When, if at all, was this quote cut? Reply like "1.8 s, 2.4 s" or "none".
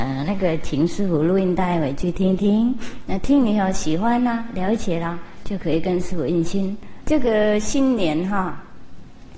7.0 s